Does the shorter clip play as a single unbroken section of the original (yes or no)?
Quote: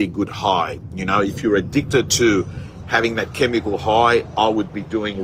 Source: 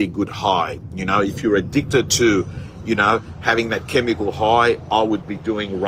no